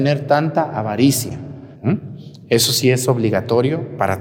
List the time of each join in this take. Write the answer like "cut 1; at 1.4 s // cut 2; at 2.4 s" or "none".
cut 1; at 1.7 s

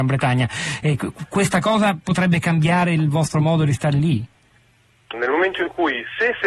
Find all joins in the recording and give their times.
cut 1; at 5.1 s

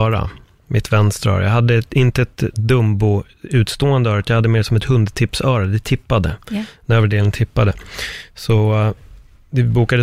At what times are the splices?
none

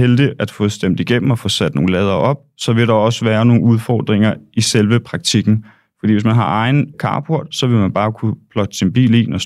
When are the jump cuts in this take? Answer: none

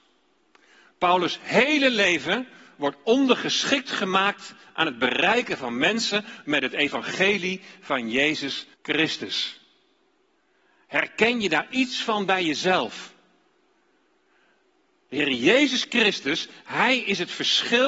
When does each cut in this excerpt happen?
cut 1; at 8.7 s

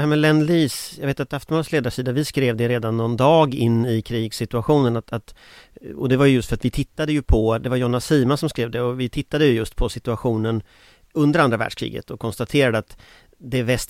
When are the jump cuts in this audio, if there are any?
none

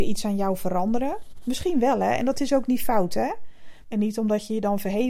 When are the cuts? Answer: cut 1; at 3.8 s

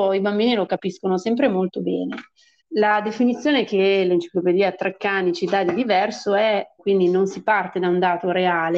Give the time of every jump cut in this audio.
cut 1; at 2.6 s // cut 2; at 6.8 s

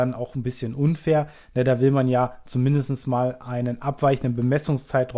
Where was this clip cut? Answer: none

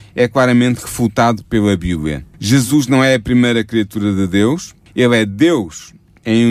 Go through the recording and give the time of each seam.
cut 1; at 2.3 s // cut 2; at 4.9 s

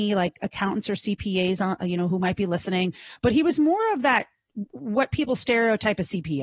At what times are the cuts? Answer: none

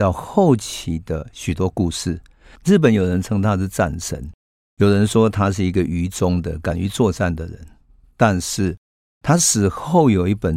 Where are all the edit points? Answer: cut 1; at 2.6 s

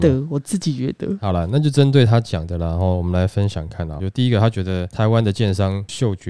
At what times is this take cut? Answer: cut 1; at 3.7 s

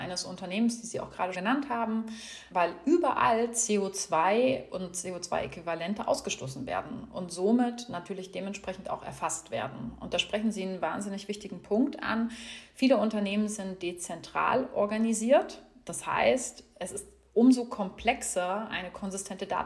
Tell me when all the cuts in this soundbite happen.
cut 1; at 1.3 s

